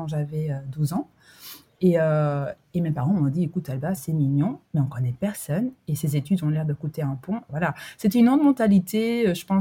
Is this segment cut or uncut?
cut